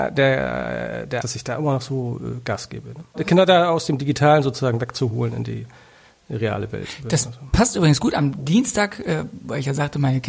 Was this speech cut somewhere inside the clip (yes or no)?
yes